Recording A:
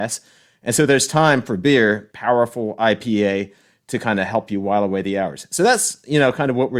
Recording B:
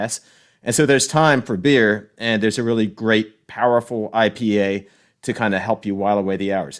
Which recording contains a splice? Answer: A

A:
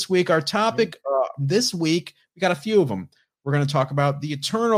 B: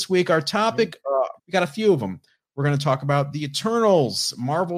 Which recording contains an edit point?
B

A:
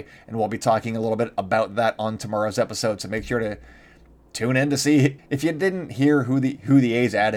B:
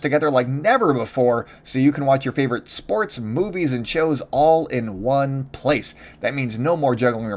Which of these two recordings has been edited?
A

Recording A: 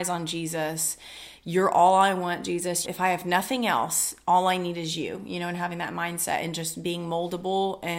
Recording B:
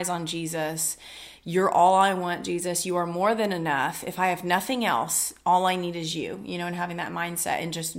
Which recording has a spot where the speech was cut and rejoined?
A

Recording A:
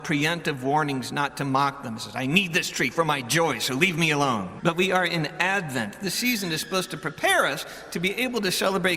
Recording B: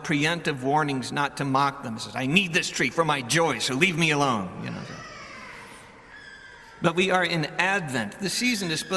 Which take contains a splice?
A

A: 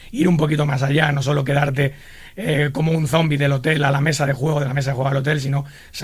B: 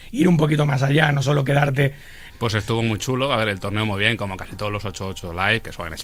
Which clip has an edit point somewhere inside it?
B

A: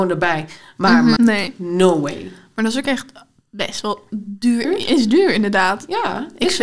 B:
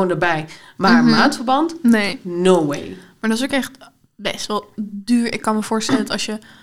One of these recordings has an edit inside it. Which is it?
A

